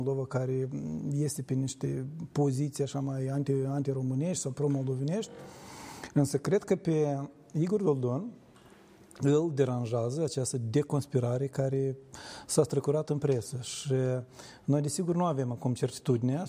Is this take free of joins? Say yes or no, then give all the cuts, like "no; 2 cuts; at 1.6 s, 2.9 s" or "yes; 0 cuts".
yes; 0 cuts